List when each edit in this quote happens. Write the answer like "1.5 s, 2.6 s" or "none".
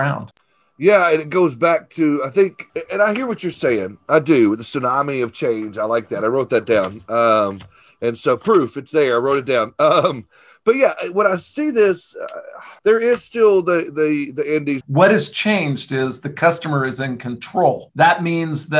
14.8 s